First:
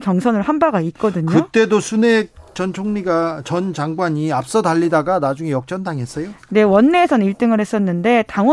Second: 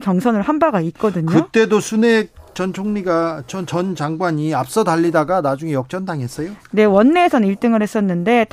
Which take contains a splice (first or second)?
first